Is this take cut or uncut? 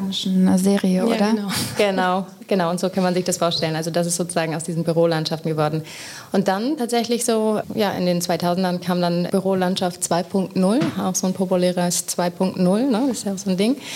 uncut